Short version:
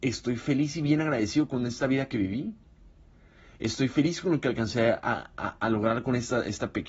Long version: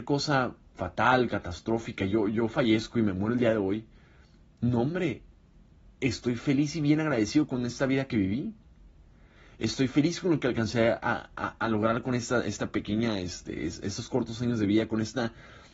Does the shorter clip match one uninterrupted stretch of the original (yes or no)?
yes